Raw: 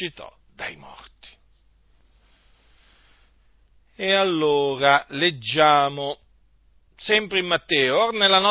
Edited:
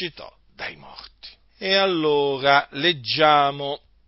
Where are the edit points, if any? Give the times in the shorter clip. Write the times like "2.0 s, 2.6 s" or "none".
1.5 s